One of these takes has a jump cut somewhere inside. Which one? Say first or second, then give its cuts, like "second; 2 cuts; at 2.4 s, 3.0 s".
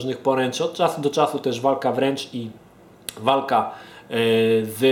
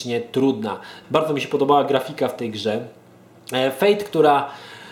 second; 1 cut; at 1.0 s